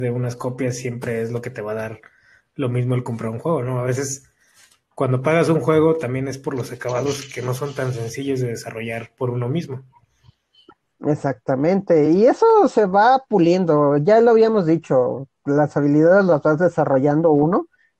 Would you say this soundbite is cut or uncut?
uncut